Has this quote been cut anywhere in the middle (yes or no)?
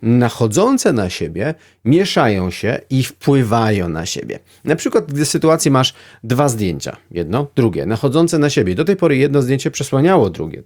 no